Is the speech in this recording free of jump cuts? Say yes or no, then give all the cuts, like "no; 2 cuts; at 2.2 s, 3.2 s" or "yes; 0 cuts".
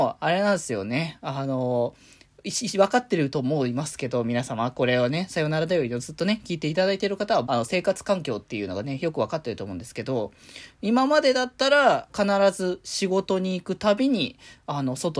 no; 2 cuts; at 7.5 s, 12.1 s